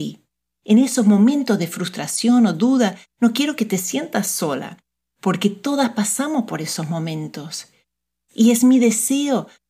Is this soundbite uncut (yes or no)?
yes